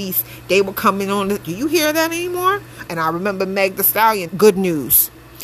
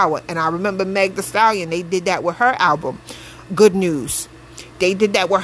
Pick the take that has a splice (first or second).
first